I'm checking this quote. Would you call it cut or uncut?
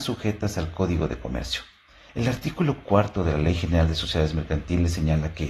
cut